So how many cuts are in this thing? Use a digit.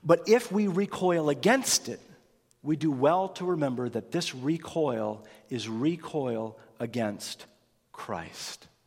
0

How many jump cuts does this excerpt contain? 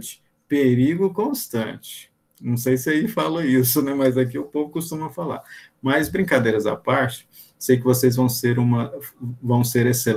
0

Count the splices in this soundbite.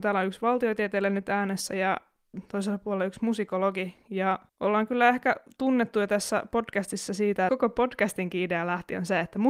2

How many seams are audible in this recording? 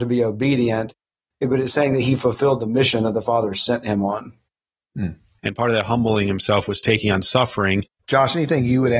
2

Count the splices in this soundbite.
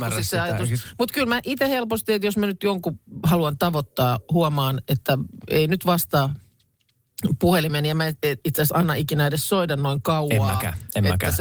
0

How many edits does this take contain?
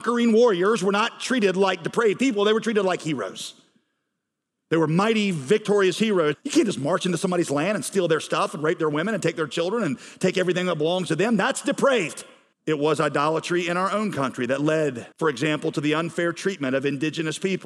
3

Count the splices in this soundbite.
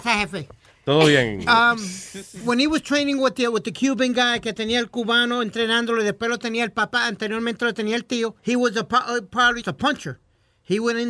2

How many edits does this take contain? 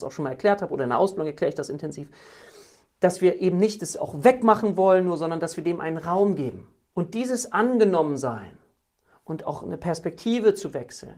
1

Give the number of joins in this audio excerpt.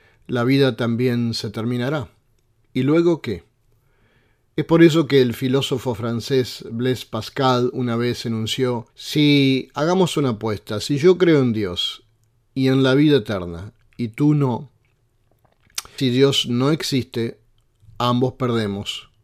2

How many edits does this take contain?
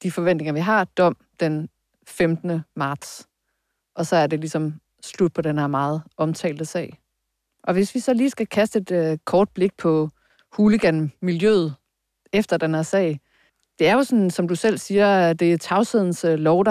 0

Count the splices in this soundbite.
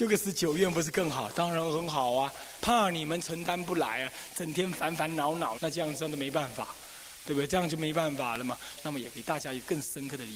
3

